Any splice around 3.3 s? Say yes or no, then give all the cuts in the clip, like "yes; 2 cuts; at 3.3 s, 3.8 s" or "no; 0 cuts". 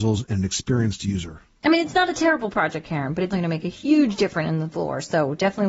yes; 1 cut; at 3.3 s